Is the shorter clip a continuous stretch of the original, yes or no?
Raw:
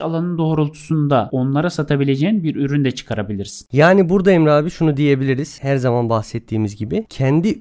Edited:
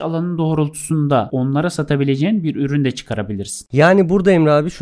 yes